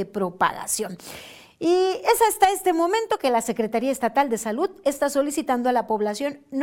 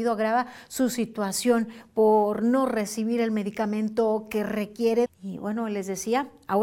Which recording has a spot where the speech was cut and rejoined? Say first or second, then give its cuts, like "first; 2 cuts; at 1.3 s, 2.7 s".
second; 1 cut; at 5.1 s